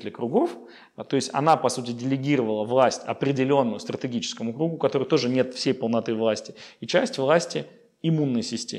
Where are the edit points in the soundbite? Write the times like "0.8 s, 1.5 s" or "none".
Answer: none